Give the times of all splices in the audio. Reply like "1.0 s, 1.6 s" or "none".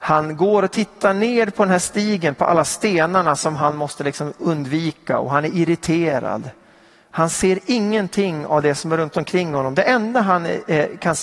none